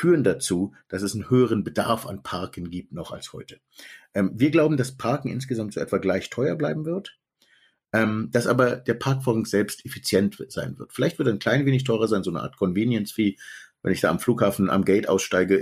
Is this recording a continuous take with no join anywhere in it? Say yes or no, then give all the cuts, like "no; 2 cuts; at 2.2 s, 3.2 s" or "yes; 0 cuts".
yes; 0 cuts